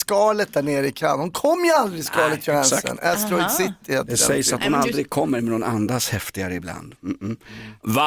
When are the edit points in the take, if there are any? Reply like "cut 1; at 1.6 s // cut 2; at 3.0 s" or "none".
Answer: none